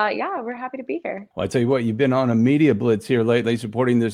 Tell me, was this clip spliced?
yes; 1 cut; at 1.3 s

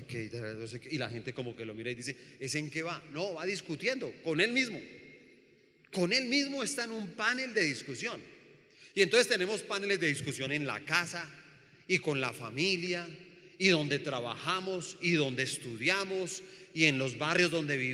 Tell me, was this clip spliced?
no; 0 cuts

